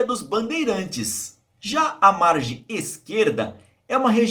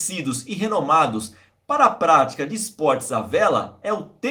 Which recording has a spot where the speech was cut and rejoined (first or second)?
first